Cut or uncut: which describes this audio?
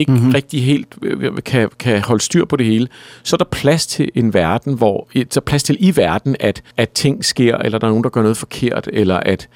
cut